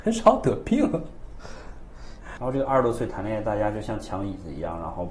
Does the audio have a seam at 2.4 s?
yes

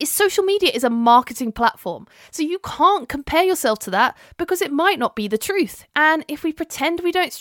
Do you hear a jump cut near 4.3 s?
no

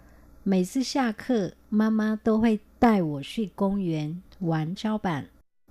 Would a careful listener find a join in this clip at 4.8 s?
yes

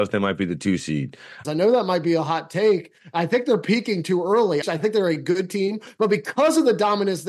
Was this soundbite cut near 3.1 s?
no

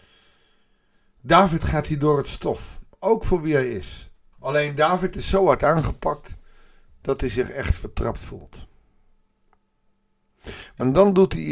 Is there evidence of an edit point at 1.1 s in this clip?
no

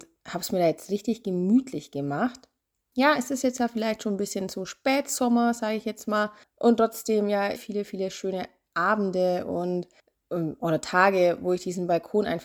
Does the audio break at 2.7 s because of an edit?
no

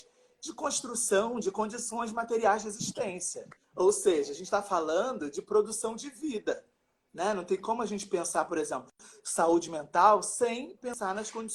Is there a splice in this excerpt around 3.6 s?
yes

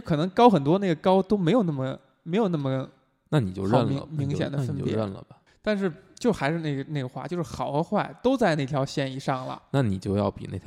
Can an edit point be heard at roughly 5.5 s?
yes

